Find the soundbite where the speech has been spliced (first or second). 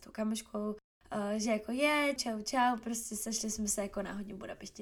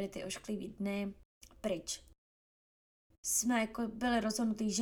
first